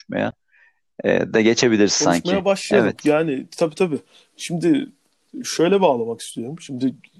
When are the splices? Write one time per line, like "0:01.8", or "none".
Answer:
none